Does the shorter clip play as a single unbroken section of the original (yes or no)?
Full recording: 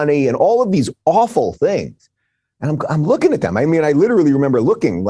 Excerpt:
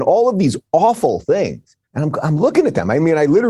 no